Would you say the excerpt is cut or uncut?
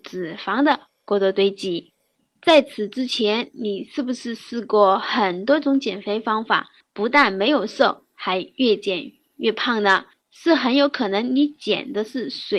uncut